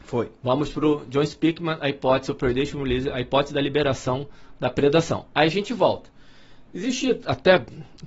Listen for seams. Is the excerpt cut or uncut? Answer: uncut